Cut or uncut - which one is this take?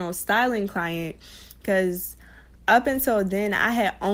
uncut